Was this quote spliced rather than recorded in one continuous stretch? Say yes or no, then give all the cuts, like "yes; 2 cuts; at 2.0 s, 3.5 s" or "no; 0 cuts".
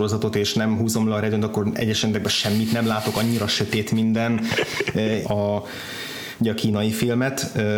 yes; 1 cut; at 5.2 s